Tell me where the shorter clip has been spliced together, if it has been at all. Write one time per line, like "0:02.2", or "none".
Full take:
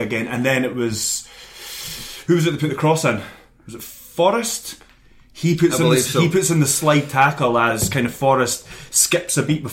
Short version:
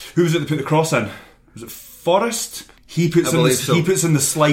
0:02.8